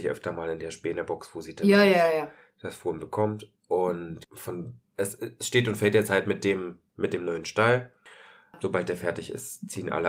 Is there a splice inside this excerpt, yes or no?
no